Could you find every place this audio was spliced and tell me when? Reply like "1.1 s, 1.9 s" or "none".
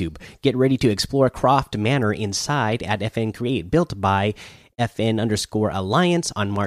none